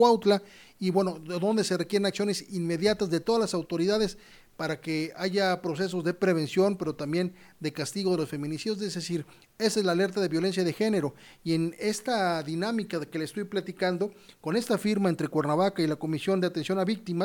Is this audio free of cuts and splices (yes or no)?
yes